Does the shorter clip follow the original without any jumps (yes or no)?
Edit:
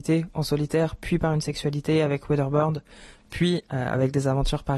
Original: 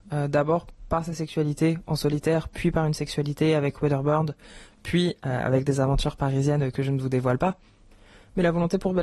yes